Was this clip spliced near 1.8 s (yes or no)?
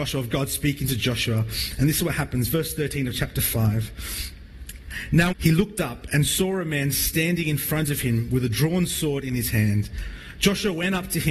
no